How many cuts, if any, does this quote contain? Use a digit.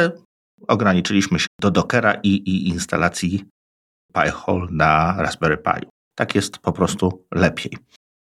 2